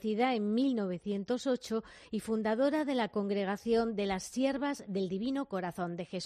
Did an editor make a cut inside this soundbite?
no; 0 cuts

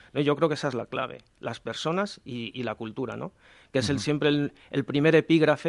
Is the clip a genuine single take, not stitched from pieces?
yes; 0 cuts

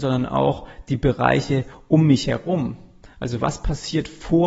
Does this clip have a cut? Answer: no; 0 cuts

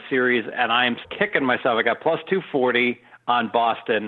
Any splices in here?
yes; 1 cut; at 1.0 s

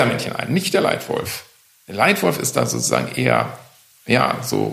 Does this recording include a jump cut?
no; 0 cuts

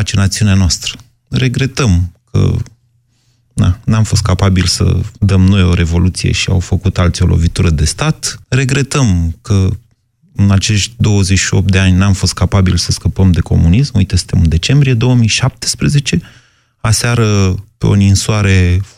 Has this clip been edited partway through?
yes; 1 cut; at 8.4 s

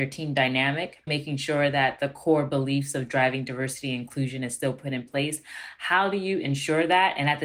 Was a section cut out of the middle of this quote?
yes; 1 cut; at 1.1 s

